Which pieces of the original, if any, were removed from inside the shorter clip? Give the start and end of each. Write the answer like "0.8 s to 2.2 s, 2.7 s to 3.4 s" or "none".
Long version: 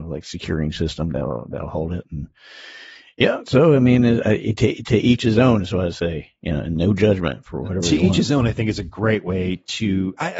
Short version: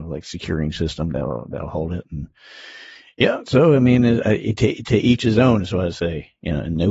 none